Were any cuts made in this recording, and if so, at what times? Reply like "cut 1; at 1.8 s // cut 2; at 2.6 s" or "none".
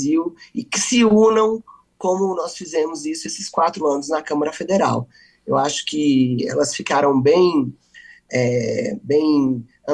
none